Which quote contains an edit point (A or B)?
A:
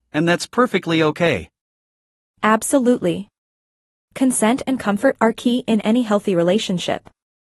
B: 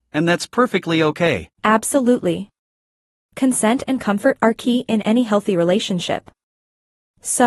B